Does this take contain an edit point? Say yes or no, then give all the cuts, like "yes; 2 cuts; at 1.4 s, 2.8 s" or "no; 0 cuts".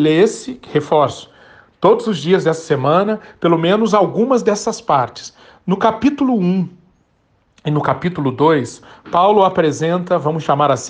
no; 0 cuts